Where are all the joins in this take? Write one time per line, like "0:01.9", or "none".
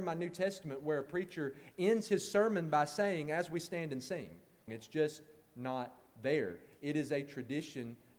0:04.7